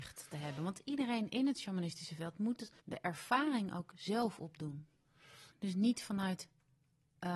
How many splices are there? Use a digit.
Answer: 2